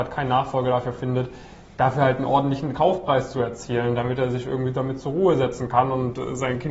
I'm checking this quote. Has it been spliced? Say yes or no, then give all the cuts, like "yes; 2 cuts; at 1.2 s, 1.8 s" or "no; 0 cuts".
no; 0 cuts